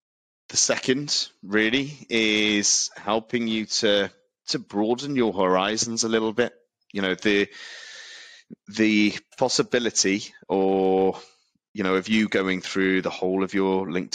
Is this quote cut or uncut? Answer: uncut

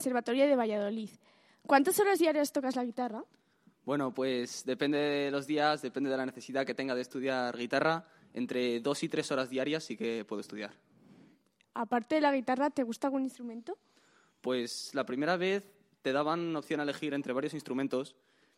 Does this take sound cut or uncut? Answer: uncut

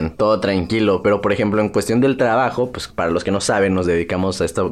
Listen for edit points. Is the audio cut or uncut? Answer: uncut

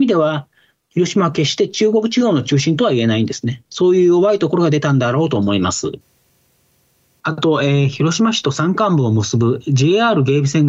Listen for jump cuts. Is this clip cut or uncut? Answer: uncut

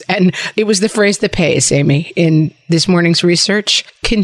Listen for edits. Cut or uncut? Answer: uncut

